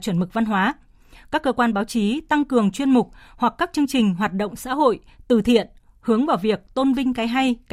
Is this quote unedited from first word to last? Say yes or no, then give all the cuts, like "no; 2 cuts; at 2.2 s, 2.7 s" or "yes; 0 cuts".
yes; 0 cuts